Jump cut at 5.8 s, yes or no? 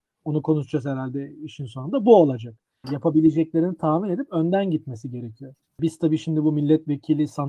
no